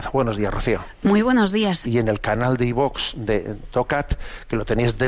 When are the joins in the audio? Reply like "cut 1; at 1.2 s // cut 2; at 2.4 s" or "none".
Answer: cut 1; at 1.8 s

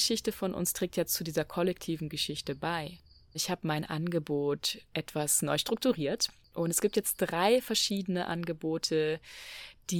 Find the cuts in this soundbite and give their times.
cut 1; at 3.3 s

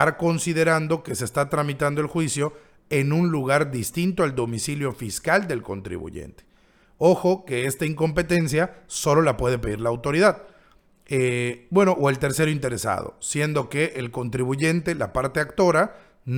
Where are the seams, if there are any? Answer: none

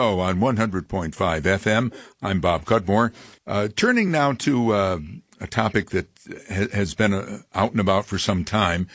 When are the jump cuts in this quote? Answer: none

